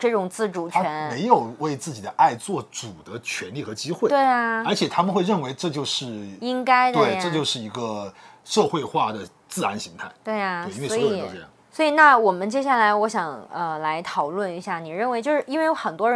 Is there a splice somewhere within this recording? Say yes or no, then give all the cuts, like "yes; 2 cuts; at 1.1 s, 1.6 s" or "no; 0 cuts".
yes; 1 cut; at 11.6 s